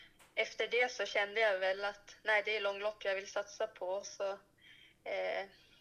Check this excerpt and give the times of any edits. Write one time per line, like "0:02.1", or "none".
none